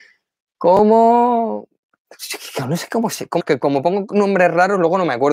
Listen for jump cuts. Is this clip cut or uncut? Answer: cut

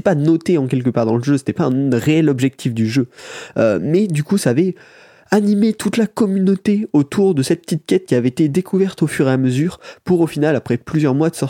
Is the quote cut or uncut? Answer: uncut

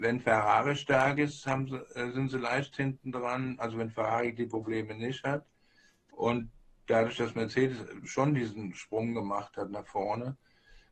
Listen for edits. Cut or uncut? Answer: uncut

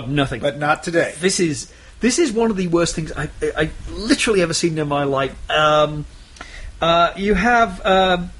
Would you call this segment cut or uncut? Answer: uncut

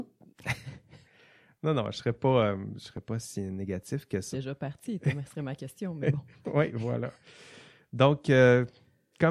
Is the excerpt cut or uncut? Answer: cut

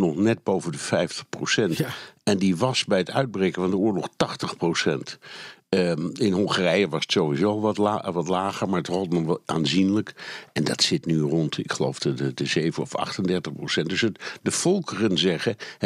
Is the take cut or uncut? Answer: uncut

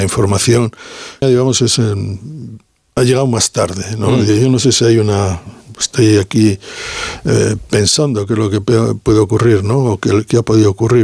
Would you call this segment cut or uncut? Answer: cut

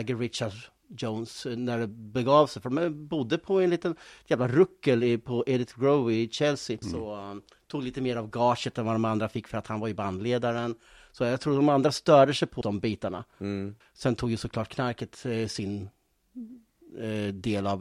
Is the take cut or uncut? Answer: cut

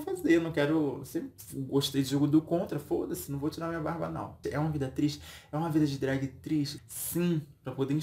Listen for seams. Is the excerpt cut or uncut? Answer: cut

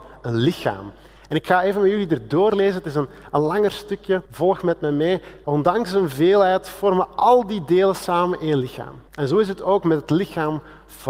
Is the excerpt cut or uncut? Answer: cut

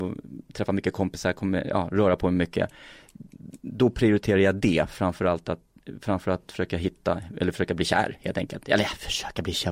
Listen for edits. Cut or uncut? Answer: uncut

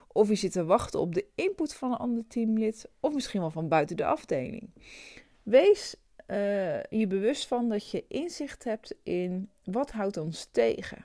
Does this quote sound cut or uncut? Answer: uncut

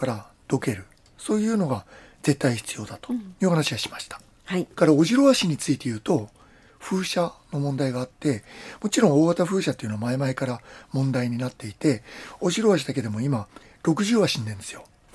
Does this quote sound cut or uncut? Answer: uncut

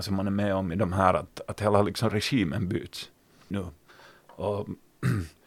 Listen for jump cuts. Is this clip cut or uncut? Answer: cut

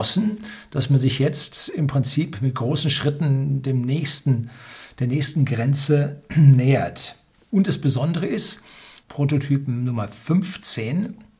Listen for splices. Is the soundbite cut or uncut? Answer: cut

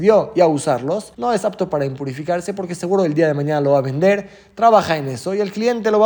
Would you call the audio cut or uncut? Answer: cut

